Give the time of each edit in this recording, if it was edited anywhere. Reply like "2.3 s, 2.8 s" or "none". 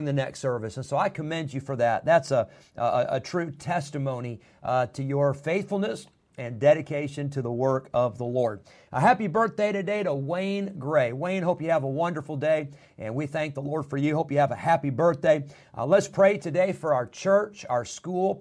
none